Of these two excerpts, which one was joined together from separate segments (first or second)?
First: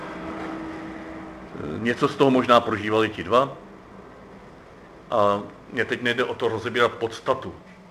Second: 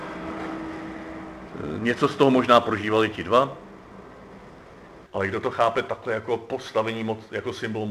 second